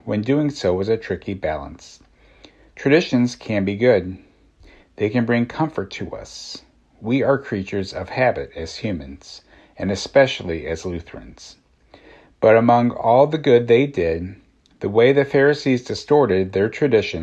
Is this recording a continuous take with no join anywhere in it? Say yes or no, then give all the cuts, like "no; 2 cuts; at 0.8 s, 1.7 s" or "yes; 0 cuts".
yes; 0 cuts